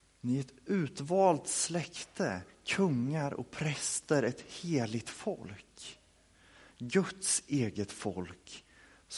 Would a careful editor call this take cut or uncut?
uncut